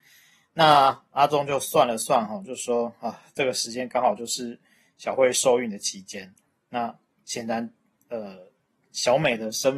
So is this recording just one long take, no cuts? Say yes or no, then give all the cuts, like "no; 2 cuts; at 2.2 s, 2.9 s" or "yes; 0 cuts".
yes; 0 cuts